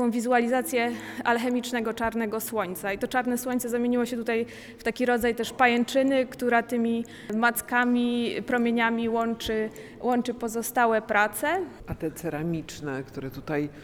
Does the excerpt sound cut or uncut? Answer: uncut